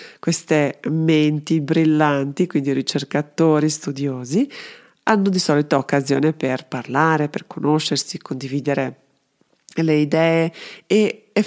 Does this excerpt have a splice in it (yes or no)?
no